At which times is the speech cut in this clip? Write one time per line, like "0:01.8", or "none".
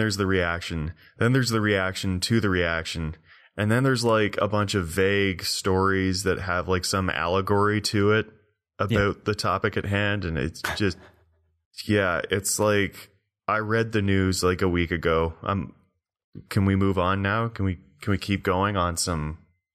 none